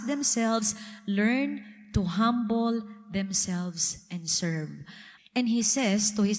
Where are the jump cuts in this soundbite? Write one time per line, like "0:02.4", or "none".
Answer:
0:05.2